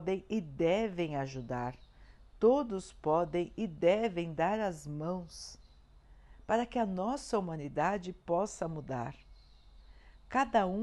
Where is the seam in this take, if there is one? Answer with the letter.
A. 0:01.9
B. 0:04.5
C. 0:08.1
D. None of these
D